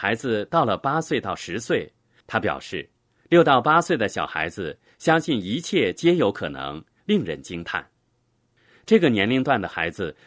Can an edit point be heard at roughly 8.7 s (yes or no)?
no